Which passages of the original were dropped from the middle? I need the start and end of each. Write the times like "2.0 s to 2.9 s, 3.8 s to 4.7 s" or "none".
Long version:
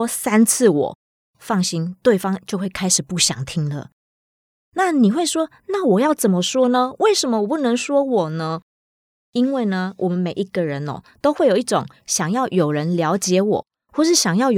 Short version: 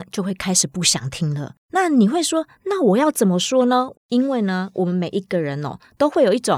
4.0 s to 4.6 s, 7.0 s to 9.2 s